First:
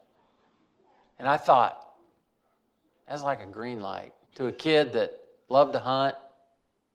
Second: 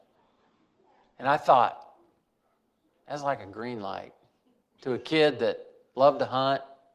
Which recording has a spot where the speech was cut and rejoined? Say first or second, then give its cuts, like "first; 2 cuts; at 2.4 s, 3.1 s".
first; 1 cut; at 4.2 s